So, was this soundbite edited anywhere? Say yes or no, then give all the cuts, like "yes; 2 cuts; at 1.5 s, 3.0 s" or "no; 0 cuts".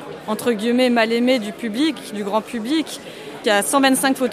yes; 1 cut; at 3.4 s